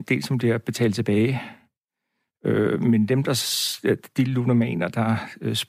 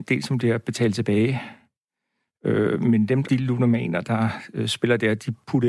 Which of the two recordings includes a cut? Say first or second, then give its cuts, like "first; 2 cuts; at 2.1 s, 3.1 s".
second; 1 cut; at 3.2 s